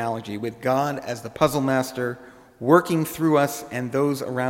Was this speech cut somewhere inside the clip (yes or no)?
no